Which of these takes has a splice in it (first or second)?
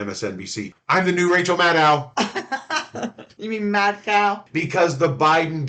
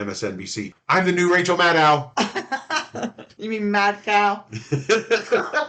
first